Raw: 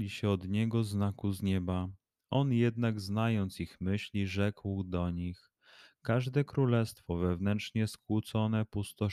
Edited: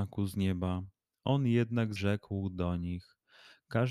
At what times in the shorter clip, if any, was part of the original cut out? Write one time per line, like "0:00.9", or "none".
0:02.0